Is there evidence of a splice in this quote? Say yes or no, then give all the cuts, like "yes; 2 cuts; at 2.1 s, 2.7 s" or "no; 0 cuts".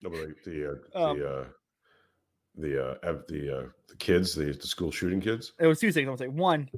yes; 1 cut; at 5.6 s